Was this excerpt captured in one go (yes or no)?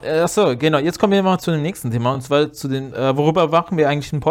yes